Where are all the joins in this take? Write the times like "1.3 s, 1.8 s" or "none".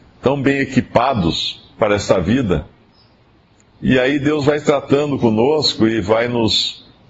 none